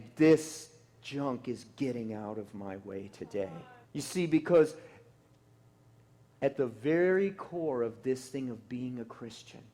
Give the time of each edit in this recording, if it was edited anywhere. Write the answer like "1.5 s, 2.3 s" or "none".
3.8 s